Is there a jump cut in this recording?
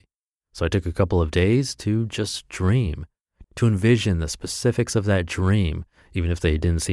yes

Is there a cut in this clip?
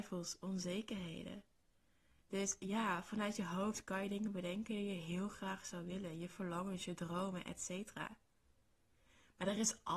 no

